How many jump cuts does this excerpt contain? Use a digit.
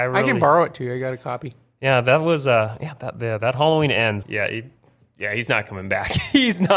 1